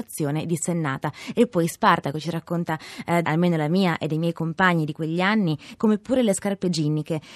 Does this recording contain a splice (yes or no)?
yes